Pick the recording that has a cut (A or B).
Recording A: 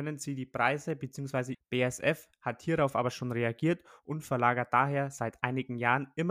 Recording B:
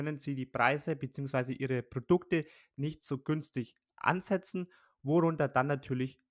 A